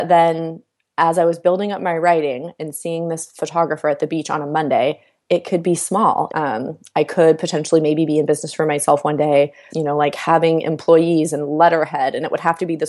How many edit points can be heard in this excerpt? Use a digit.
3